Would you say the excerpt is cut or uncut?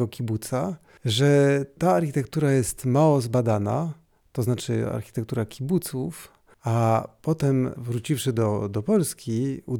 uncut